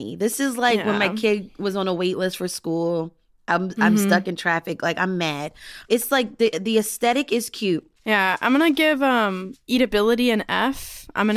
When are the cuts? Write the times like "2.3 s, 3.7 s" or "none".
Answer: 5.9 s, 8.0 s